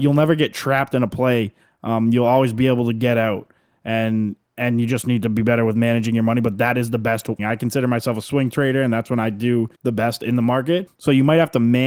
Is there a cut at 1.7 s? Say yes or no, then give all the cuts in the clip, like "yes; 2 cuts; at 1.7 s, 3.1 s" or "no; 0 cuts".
no; 3 cuts; at 7.4 s, 9.8 s, 10.9 s